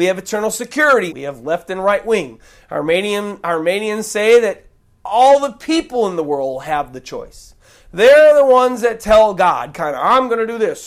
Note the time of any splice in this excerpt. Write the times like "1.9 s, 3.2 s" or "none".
1.1 s